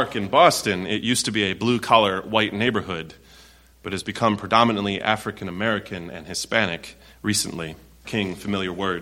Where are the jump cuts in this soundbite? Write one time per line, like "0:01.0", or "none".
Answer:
0:08.0